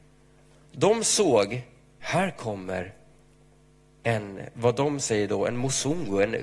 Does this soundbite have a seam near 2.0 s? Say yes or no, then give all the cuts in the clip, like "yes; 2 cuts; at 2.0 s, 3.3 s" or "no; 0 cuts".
yes; 1 cut; at 2.0 s